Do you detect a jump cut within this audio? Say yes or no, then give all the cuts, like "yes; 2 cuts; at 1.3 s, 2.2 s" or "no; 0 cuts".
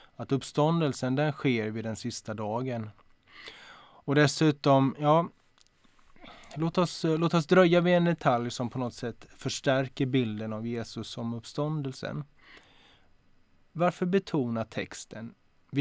no; 0 cuts